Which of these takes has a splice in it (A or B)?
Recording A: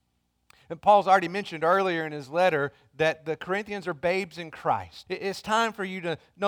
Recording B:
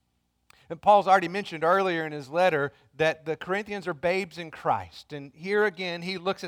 A